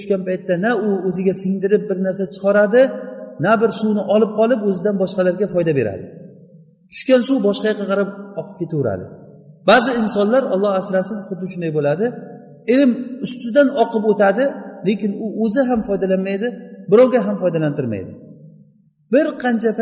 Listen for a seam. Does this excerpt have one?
no; 0 cuts

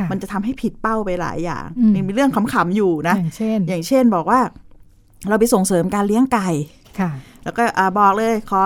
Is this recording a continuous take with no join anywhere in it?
yes; 0 cuts

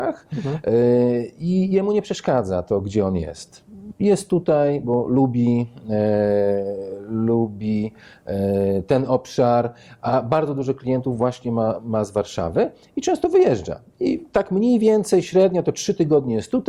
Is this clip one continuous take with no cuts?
yes; 0 cuts

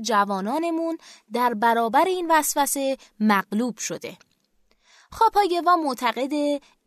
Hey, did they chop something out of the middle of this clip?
no; 0 cuts

